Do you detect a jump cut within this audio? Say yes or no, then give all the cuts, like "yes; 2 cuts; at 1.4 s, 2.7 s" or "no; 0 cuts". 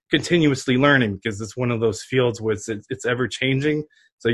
no; 0 cuts